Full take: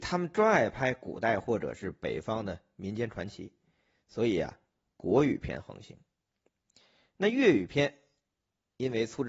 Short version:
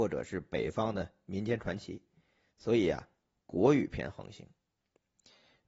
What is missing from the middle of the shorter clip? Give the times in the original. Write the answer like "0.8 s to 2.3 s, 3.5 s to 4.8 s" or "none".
none